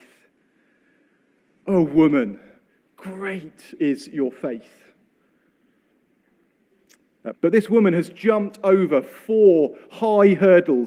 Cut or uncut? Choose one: cut